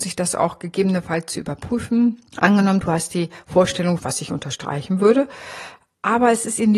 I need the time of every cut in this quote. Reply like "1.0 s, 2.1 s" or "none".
2.3 s, 4.0 s